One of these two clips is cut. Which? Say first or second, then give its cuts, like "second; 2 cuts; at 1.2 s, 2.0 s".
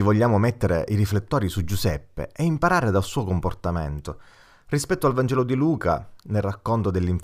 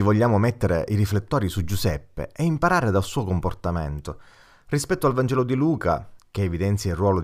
second; 1 cut; at 6.2 s